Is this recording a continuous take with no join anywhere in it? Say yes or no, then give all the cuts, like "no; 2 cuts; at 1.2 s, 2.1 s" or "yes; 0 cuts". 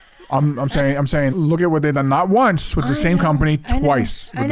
no; 1 cut; at 1.3 s